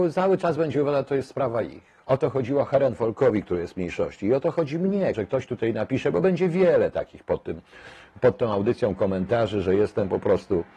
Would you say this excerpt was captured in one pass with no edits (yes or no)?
no